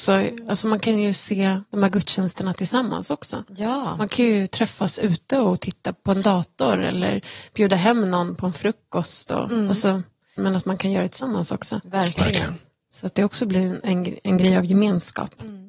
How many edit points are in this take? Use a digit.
1